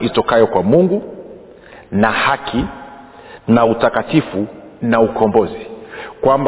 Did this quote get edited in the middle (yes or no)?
no